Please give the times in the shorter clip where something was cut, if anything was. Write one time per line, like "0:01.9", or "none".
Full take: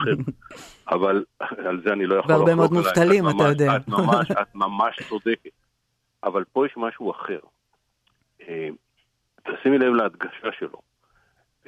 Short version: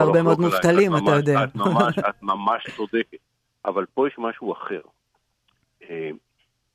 0:03.2